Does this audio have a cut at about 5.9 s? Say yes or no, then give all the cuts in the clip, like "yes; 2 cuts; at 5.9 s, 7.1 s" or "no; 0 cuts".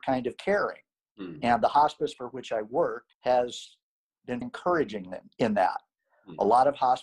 no; 3 cuts; at 1.0 s, 3.1 s, 4.4 s